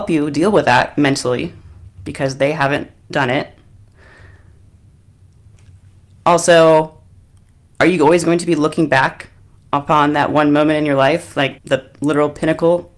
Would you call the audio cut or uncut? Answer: cut